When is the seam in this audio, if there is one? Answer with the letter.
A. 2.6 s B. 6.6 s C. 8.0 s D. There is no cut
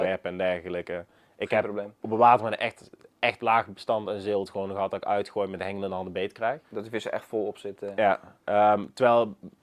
B